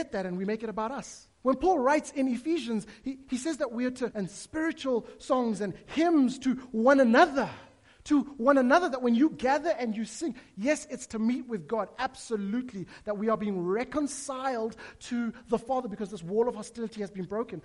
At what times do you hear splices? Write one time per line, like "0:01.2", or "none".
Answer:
0:01.3
0:04.1